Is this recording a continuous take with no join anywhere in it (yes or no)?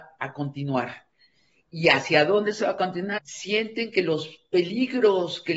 no